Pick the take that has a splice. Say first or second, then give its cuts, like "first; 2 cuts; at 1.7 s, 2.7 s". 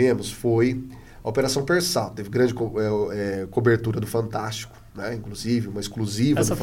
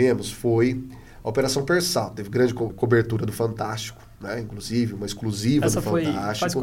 second; 1 cut; at 2.7 s